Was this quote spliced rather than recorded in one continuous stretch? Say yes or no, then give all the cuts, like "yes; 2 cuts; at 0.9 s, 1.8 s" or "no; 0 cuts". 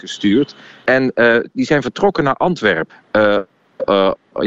yes; 1 cut; at 2.9 s